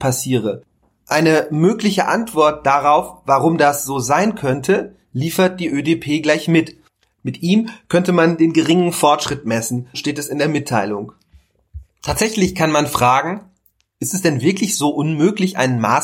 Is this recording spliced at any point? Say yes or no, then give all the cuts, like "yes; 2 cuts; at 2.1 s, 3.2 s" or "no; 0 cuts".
yes; 2 cuts; at 7.1 s, 9.9 s